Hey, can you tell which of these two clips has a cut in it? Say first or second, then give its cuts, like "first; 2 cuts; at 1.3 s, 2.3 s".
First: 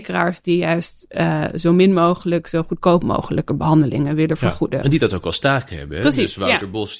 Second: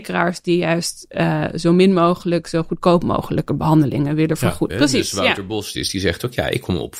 second; 2 cuts; at 4.7 s, 5.7 s